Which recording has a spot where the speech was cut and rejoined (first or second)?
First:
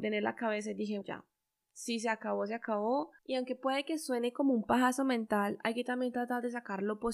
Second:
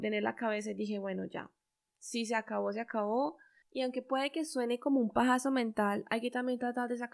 first